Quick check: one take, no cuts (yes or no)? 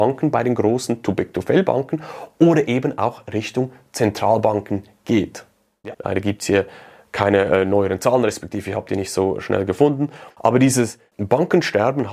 no